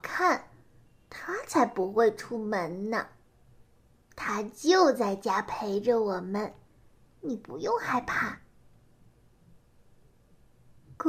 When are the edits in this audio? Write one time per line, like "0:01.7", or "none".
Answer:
none